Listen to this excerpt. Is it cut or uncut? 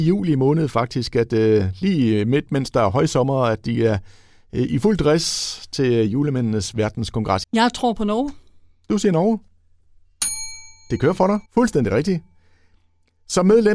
cut